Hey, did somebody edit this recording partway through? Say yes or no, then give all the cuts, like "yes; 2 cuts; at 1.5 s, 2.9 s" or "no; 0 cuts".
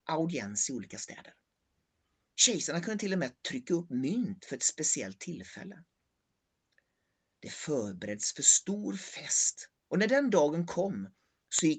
yes; 1 cut; at 2.3 s